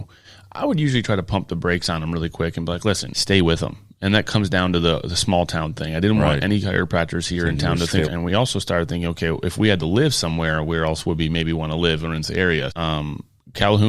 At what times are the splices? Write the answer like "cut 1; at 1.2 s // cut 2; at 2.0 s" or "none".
cut 1; at 3.1 s // cut 2; at 8.1 s // cut 3; at 12.7 s